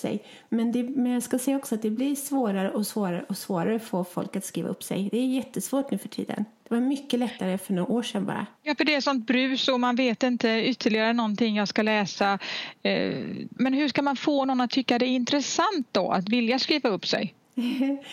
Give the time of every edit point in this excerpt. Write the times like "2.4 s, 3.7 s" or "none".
8.6 s, 13.6 s

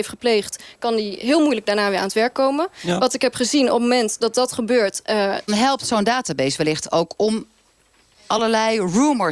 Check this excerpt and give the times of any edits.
5.5 s

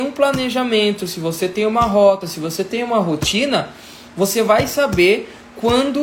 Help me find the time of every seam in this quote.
none

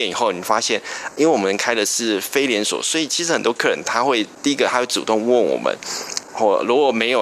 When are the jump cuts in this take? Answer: 6.2 s

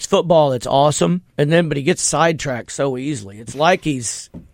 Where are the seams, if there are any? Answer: 1.3 s

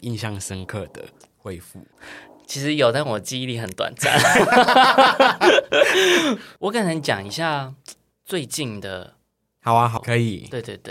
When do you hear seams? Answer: 10.0 s

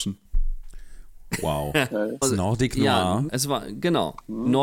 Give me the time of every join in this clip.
2.2 s, 3.3 s

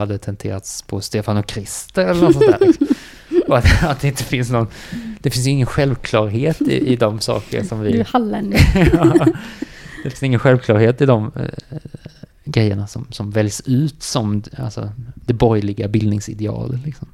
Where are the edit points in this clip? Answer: none

